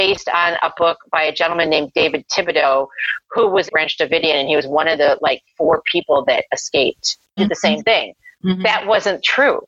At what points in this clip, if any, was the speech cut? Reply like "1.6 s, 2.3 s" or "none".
3.7 s, 7.4 s